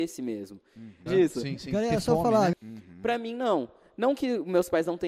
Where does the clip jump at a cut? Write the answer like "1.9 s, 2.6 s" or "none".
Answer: 1.1 s, 2.5 s